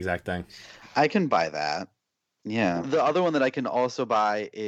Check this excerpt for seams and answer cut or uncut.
cut